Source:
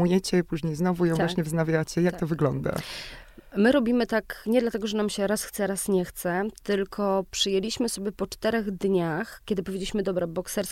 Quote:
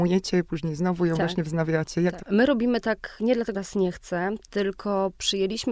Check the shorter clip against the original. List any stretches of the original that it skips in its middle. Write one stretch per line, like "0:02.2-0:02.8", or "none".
0:02.2-0:03.5
0:04.8-0:05.7